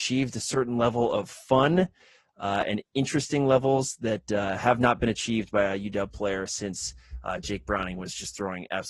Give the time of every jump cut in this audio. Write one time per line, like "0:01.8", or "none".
none